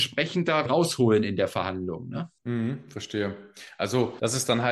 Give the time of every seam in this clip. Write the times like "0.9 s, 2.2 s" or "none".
2.4 s